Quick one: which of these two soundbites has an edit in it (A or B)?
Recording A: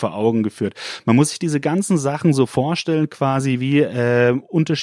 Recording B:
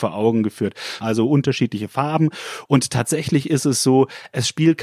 B